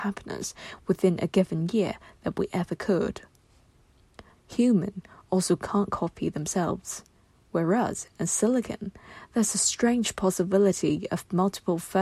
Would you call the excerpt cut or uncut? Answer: cut